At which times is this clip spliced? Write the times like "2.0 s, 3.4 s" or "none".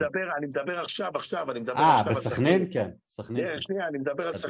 none

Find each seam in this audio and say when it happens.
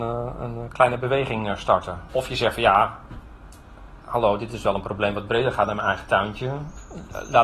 2.1 s

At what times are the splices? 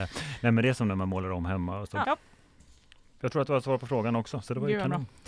2.0 s

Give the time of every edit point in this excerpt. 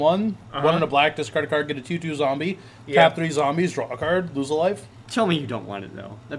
5.0 s

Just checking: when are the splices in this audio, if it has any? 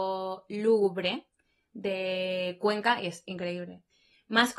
none

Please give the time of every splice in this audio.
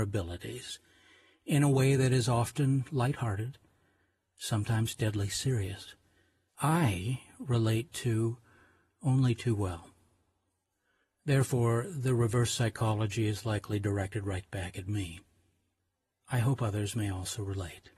6.5 s

